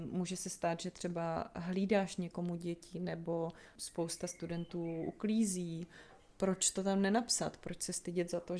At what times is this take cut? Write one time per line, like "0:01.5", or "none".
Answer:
none